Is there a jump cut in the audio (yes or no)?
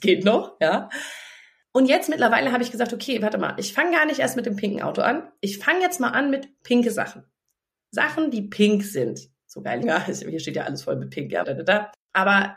yes